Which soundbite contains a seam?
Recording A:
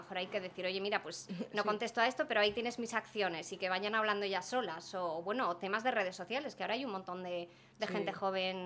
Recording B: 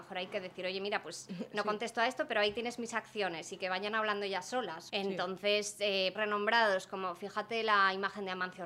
B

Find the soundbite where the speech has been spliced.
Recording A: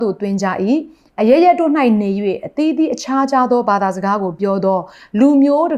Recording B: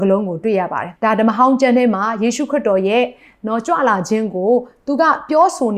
B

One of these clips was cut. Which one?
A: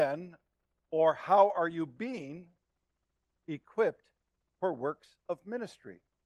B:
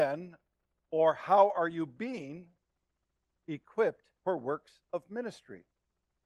B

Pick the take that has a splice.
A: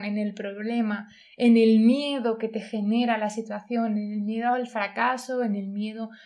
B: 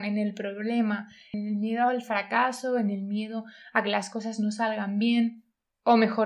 B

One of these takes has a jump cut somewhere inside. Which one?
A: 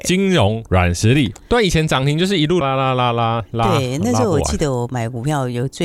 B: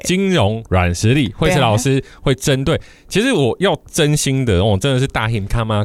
A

